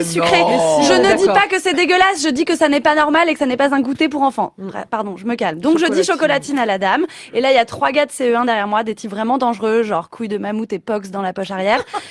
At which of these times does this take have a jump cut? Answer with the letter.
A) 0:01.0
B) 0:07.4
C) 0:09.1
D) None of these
D